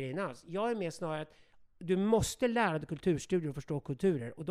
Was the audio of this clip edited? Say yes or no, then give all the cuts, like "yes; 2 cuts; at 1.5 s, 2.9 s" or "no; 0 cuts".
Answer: no; 0 cuts